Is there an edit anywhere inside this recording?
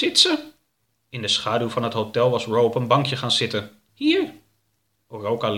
yes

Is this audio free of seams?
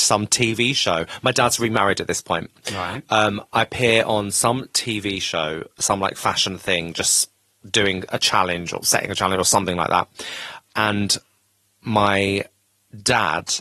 yes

